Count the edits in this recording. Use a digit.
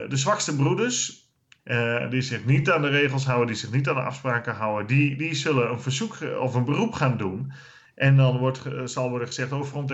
2